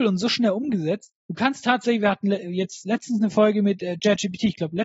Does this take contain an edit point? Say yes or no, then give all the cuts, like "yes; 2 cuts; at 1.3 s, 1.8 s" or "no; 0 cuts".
yes; 1 cut; at 1.2 s